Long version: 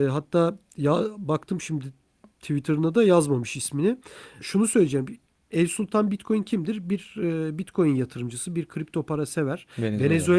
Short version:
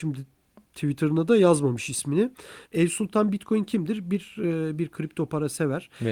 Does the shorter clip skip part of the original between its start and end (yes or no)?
yes